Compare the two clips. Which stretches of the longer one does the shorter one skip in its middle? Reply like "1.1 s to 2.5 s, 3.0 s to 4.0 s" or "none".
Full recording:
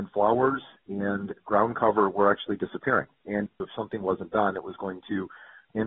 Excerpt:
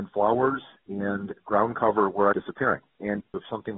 2.3 s to 2.6 s